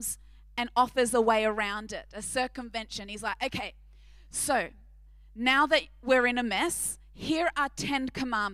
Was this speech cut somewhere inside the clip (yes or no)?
no